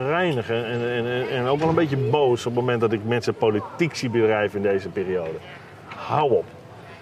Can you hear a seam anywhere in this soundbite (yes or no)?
no